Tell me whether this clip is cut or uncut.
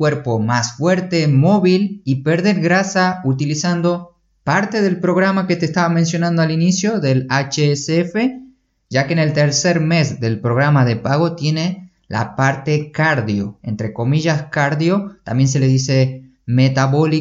uncut